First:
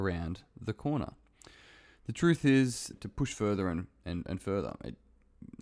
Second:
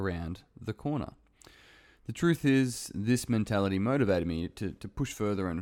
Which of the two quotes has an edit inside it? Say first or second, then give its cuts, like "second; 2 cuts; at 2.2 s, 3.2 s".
first; 1 cut; at 2.9 s